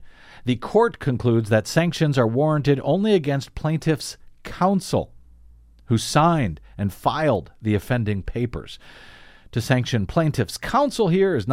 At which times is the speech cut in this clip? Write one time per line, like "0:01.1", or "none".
none